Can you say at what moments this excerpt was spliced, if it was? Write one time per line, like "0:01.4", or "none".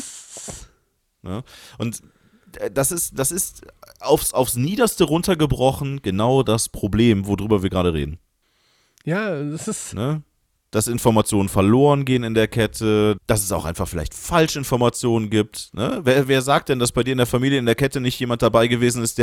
0:13.2